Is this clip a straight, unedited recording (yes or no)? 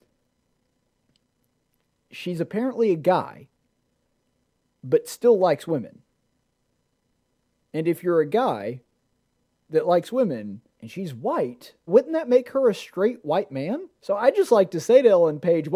no